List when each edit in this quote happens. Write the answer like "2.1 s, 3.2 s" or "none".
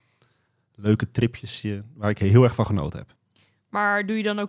none